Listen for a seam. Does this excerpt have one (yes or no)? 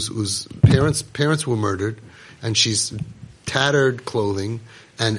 no